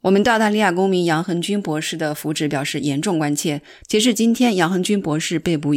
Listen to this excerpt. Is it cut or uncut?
cut